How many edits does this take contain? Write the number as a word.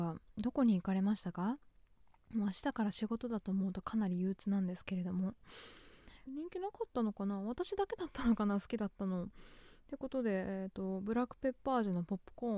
one